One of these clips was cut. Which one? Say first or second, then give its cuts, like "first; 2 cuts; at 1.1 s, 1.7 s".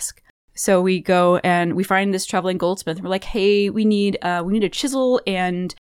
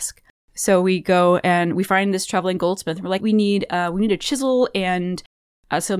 second; 1 cut; at 3.2 s